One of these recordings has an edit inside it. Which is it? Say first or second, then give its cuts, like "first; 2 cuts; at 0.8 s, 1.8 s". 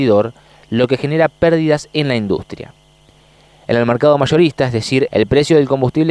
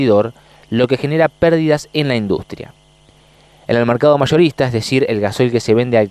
first; 1 cut; at 5.1 s